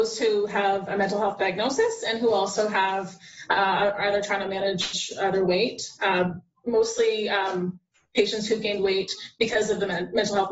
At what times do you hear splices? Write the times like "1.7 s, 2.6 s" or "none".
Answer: none